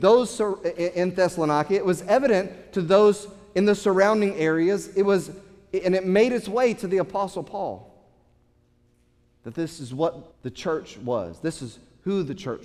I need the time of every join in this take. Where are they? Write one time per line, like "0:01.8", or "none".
0:10.3